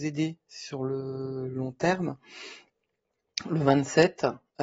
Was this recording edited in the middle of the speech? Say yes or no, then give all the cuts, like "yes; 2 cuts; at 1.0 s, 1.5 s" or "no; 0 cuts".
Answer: no; 0 cuts